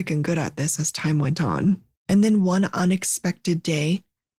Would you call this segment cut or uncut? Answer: cut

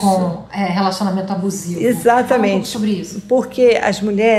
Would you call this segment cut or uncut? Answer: uncut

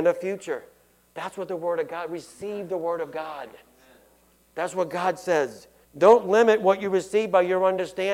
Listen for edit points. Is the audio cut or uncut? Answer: cut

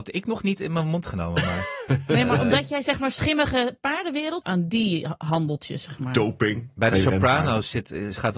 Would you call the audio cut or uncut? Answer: cut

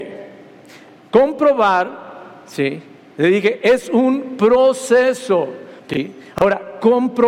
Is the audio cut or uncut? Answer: cut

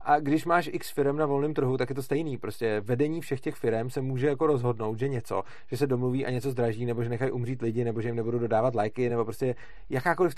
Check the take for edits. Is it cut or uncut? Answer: uncut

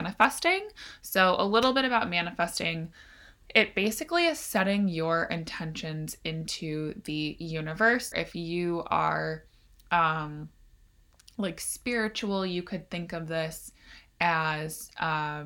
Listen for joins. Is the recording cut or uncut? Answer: cut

